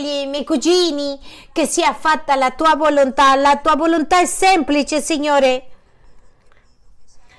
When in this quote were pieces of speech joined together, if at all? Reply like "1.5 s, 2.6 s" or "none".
none